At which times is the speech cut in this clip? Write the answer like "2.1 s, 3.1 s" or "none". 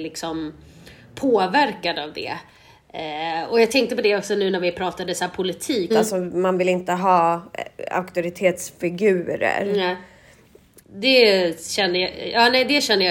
5.9 s, 10.8 s